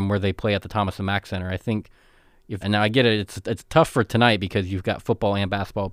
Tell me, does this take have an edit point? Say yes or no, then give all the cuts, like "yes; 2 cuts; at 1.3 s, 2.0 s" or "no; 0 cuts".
yes; 1 cut; at 2.6 s